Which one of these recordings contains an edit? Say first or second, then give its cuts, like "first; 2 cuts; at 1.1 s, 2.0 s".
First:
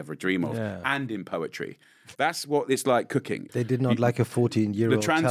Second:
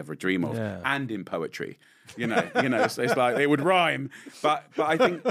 first; 2 cuts; at 2.1 s, 3.5 s